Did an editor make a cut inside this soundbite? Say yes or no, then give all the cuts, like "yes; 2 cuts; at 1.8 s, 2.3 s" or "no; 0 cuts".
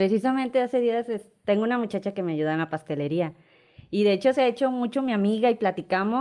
no; 0 cuts